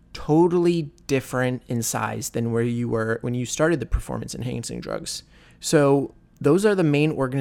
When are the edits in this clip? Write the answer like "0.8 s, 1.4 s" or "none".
5.5 s